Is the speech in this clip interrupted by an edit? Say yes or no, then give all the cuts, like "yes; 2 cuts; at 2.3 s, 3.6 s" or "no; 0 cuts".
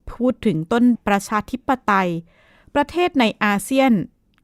yes; 1 cut; at 0.9 s